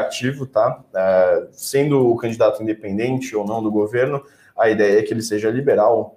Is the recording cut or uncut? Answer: uncut